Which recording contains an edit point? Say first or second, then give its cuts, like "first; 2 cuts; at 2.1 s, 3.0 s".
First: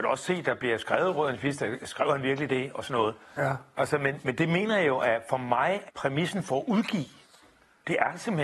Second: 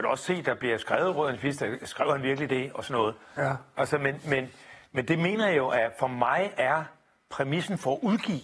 first; 2 cuts; at 4.2 s, 5.9 s